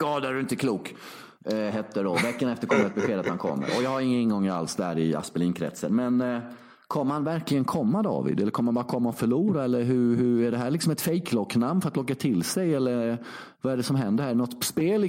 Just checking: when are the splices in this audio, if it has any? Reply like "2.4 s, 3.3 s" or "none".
none